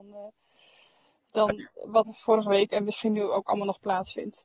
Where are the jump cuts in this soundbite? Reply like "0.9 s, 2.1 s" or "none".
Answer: 2.0 s